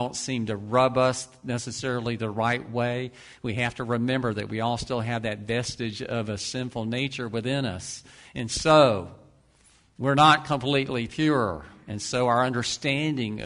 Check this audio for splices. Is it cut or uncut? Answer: uncut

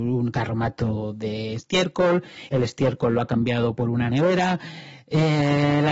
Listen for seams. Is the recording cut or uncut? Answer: uncut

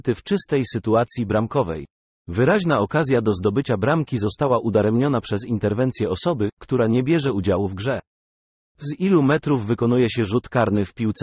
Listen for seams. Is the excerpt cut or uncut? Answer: uncut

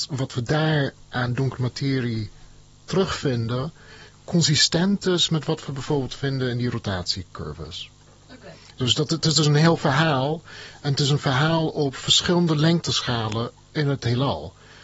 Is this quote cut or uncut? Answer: uncut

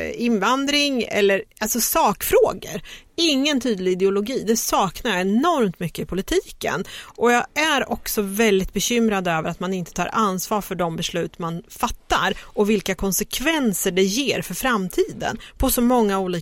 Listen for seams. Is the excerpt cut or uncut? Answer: uncut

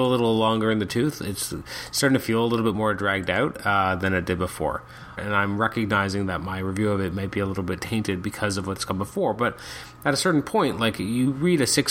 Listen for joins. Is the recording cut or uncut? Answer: cut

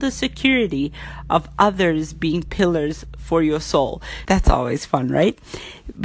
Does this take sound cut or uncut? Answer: cut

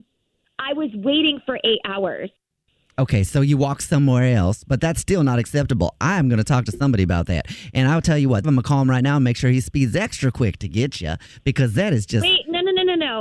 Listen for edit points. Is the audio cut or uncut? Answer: cut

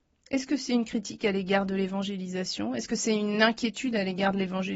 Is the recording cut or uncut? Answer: uncut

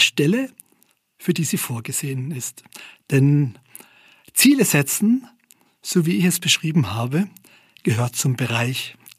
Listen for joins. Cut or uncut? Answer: uncut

